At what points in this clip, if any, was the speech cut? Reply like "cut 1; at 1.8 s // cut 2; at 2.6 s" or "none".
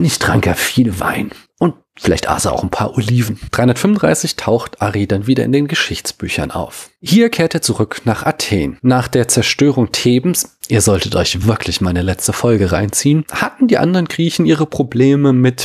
none